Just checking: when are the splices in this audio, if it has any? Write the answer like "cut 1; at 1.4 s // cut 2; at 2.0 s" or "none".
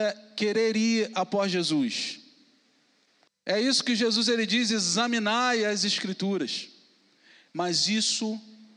cut 1; at 3.3 s // cut 2; at 7.5 s